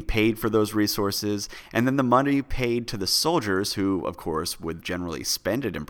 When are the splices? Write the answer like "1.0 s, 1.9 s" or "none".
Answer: 4.8 s